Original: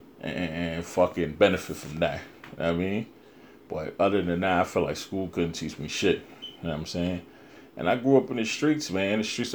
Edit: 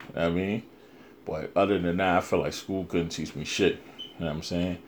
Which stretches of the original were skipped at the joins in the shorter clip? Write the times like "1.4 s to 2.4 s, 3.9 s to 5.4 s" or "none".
none